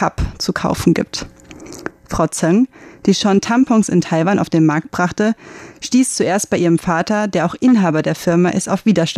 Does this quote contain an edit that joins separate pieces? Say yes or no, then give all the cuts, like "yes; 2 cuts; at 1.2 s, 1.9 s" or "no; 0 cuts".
yes; 1 cut; at 1.9 s